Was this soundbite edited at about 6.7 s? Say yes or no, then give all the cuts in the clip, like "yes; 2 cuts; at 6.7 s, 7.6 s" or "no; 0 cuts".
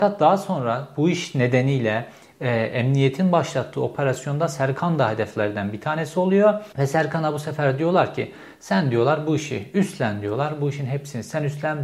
yes; 1 cut; at 6.7 s